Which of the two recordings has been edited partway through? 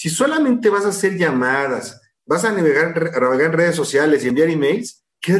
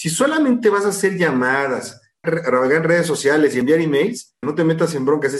second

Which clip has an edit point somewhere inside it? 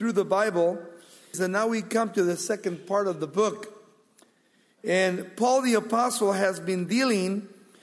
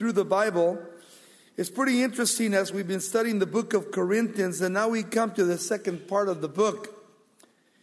first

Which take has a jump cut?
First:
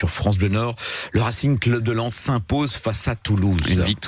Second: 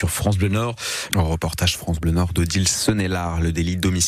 second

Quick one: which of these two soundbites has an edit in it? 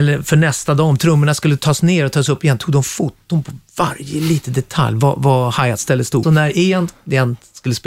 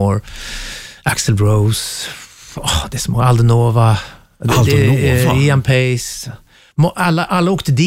first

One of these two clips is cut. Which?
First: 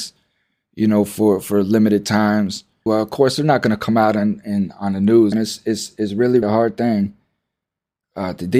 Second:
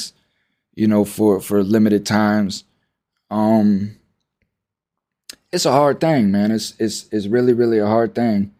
first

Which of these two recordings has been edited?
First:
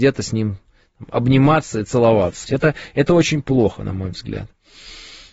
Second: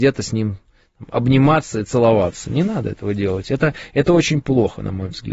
first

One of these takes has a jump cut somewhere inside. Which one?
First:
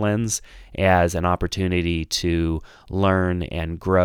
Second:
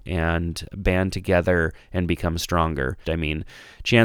second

